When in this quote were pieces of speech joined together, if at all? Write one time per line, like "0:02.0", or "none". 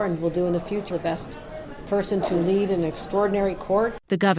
0:00.9